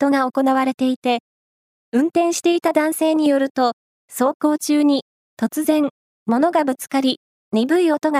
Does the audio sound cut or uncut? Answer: uncut